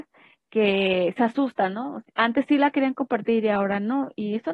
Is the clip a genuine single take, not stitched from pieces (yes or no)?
no